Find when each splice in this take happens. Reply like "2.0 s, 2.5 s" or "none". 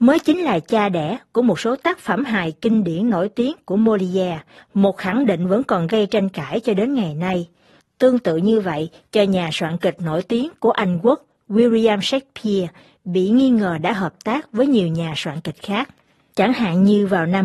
16.3 s